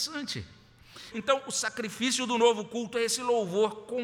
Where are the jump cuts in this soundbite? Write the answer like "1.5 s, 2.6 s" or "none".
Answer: 1.1 s